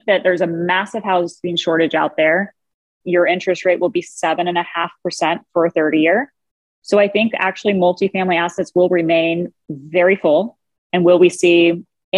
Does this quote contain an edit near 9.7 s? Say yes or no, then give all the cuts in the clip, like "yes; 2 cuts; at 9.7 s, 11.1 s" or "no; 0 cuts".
no; 2 cuts; at 3.0 s, 10.9 s